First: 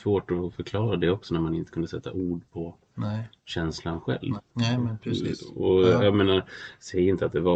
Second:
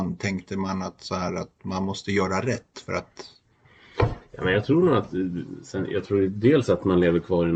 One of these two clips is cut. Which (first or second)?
first